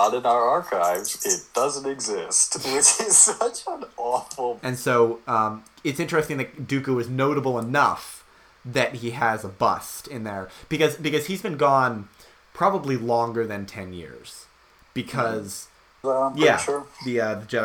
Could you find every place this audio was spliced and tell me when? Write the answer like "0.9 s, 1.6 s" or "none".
4.6 s, 16.0 s